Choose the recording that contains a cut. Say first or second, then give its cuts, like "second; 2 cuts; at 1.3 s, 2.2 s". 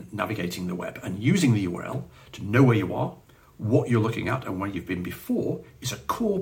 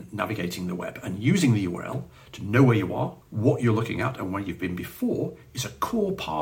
second; 1 cut; at 3.2 s